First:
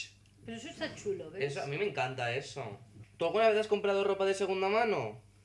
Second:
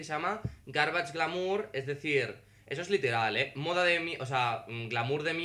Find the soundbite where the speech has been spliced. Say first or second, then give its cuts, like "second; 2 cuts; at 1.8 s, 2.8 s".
first; 1 cut; at 3.0 s